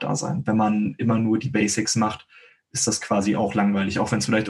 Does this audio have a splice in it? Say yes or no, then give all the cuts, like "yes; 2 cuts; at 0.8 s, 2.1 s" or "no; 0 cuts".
no; 0 cuts